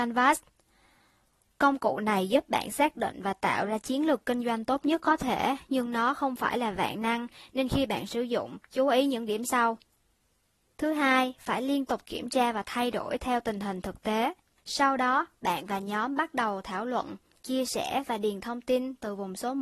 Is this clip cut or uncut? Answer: cut